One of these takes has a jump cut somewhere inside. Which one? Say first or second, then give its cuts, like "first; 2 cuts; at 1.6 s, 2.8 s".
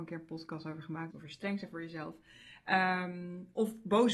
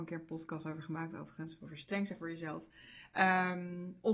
first; 1 cut; at 1.1 s